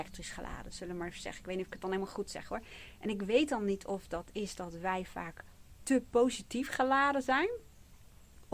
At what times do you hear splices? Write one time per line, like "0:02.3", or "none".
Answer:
none